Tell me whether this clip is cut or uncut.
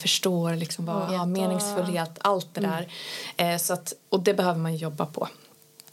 cut